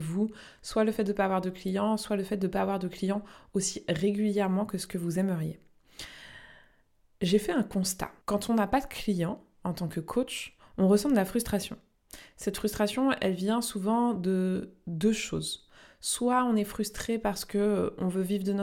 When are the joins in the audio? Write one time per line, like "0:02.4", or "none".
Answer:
0:08.2

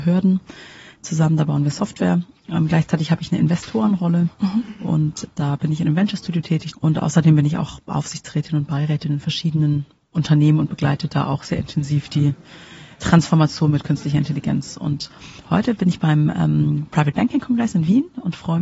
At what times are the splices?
0:06.7

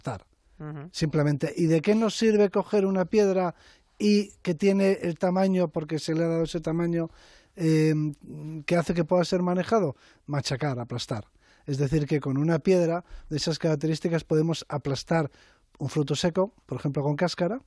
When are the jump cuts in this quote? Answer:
none

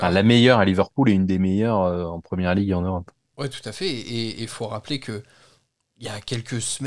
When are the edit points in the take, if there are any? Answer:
none

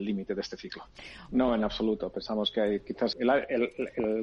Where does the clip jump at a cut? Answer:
0:01.3
0:03.1

